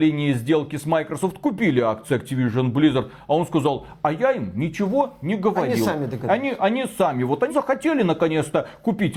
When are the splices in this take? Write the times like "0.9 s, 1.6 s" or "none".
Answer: 7.5 s